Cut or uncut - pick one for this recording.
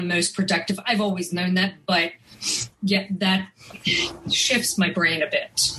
uncut